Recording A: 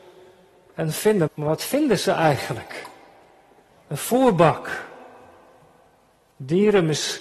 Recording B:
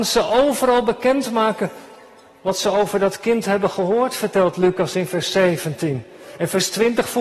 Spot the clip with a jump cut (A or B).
A